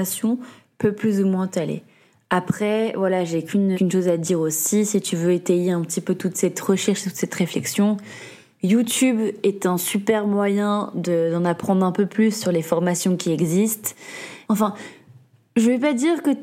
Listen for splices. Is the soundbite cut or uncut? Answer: cut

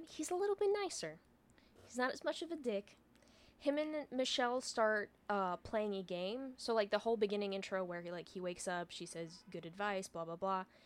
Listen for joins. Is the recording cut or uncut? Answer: uncut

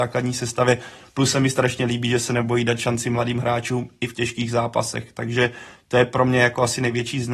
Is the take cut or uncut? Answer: uncut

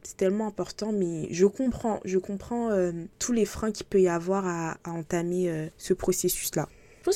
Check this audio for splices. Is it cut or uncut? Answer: uncut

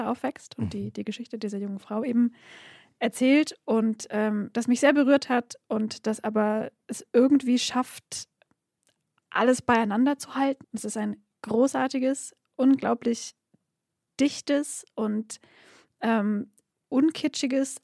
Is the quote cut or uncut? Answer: cut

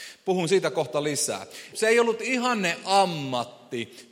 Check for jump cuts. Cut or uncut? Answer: cut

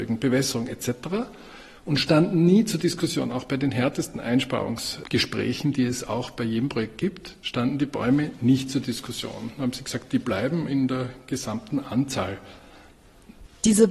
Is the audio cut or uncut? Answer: uncut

